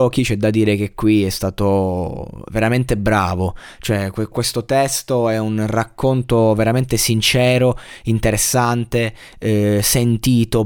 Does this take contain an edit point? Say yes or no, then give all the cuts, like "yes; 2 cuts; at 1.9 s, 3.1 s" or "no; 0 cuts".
yes; 1 cut; at 4.3 s